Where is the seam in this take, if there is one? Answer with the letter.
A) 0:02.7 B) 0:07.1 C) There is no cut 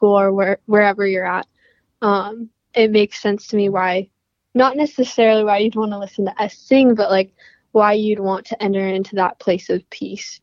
A